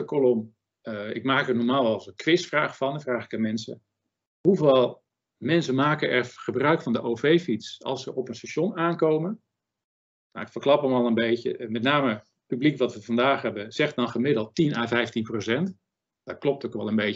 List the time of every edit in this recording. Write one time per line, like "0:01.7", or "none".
none